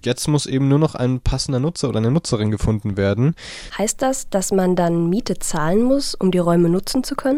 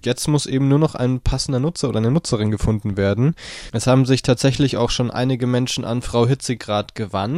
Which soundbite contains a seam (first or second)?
first